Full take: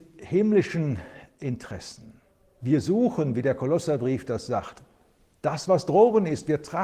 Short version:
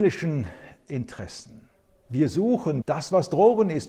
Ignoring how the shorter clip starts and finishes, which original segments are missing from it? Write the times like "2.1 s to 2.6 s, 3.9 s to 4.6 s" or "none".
3.3 s to 5.4 s